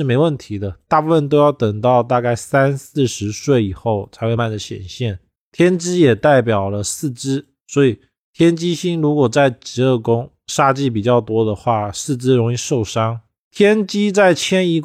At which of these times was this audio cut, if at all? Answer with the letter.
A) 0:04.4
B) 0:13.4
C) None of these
A